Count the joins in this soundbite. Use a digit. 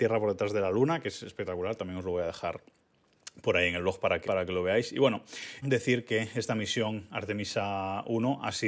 2